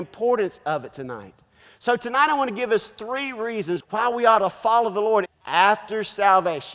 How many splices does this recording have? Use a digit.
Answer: 2